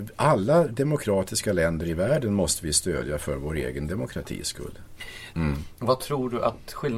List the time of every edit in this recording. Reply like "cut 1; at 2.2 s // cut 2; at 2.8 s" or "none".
cut 1; at 5.3 s